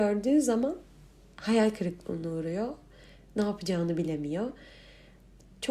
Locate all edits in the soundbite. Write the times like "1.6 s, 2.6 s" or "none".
none